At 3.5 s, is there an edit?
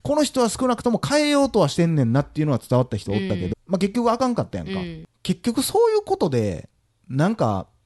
yes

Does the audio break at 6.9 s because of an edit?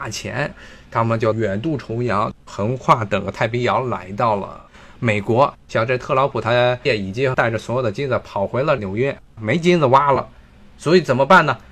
yes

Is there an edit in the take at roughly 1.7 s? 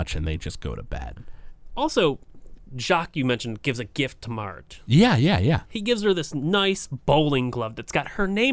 no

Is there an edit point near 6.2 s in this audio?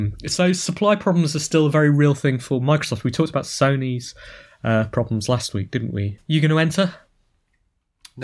yes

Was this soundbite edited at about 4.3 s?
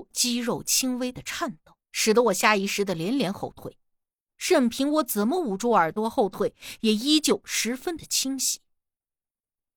yes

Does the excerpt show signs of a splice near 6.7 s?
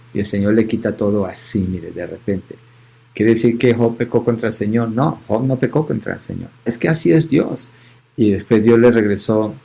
yes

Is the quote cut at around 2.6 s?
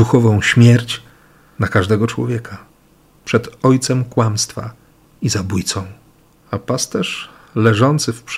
no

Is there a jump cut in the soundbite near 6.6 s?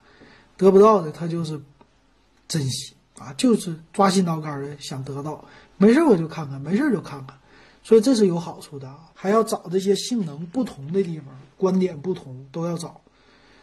no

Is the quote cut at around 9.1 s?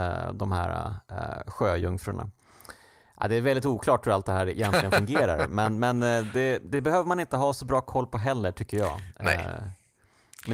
no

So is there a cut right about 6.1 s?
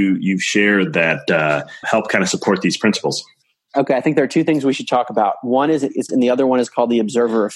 yes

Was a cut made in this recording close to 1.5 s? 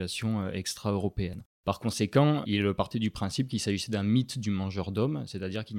yes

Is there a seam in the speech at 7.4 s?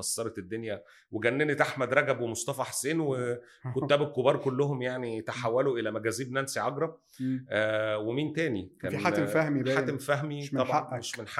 no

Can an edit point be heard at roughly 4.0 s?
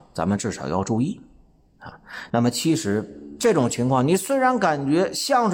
no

